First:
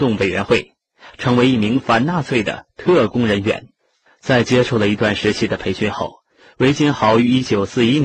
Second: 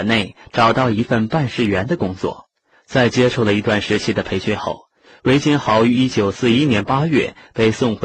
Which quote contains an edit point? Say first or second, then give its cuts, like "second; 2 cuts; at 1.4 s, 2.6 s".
second; 1 cut; at 2.7 s